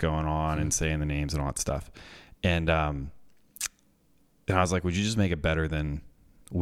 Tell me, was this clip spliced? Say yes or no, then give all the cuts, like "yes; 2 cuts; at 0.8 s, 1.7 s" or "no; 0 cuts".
no; 0 cuts